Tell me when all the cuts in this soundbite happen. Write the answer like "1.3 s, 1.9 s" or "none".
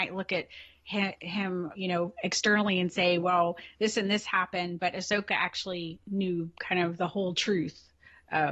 none

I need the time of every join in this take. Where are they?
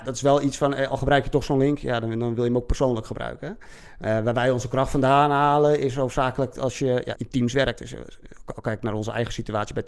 7.1 s

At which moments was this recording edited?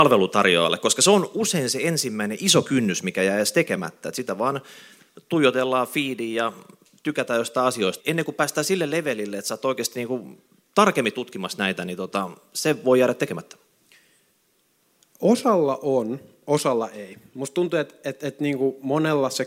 8.0 s

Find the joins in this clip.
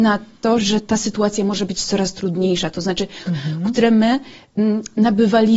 3.3 s

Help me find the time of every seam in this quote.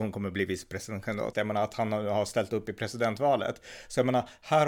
1.3 s

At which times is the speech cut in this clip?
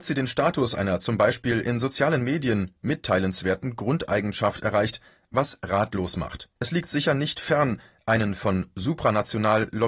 6.6 s

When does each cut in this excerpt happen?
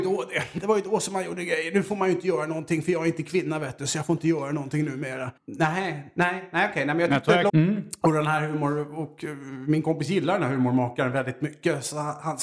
5.4 s, 7.5 s

